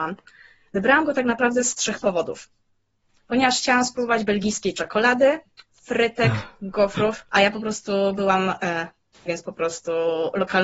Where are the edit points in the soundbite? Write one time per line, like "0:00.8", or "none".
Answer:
0:07.3
0:09.3